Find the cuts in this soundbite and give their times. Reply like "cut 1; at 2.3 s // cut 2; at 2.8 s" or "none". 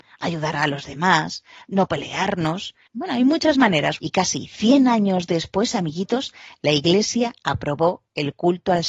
cut 1; at 2.9 s // cut 2; at 4.0 s